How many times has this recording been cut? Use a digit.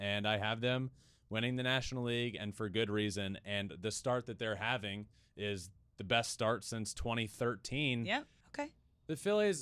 1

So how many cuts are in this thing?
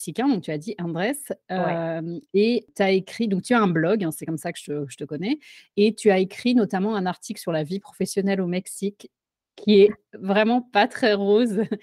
0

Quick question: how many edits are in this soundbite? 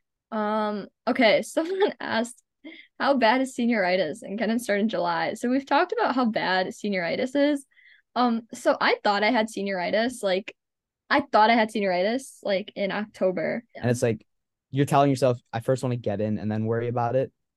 1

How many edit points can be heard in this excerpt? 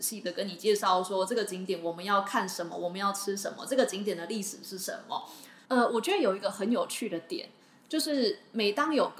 1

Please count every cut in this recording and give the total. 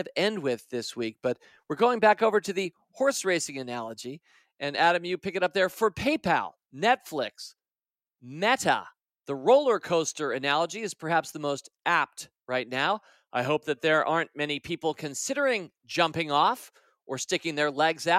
1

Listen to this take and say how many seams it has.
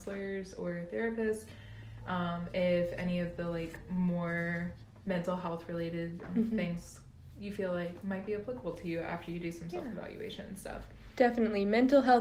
1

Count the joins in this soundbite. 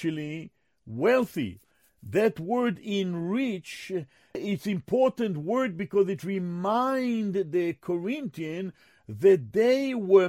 0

